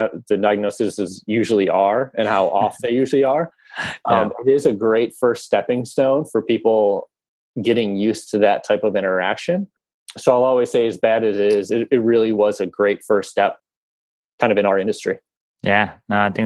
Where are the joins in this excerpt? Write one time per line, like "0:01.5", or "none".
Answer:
none